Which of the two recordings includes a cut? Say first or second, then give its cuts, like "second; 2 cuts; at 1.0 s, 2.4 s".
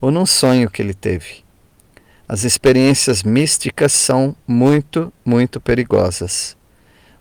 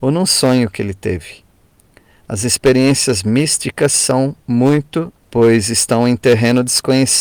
second; 1 cut; at 5.2 s